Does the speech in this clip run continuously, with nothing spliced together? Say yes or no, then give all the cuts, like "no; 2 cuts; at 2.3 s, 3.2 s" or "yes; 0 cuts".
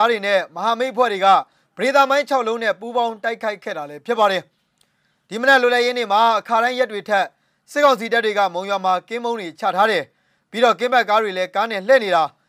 yes; 0 cuts